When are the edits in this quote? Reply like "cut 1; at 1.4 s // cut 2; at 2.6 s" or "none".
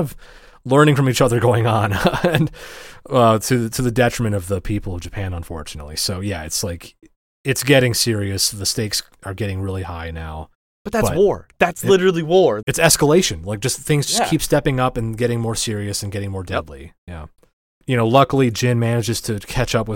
cut 1; at 12.6 s